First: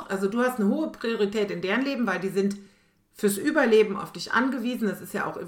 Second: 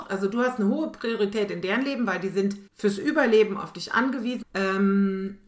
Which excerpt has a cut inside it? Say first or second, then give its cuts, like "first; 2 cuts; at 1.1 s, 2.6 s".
second; 2 cuts; at 2.7 s, 4.4 s